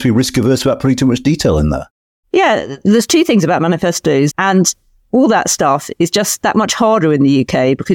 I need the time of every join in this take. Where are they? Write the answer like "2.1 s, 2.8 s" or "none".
4.3 s